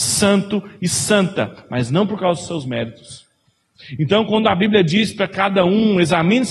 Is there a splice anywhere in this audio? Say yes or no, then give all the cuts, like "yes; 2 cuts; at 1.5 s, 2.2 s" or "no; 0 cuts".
no; 0 cuts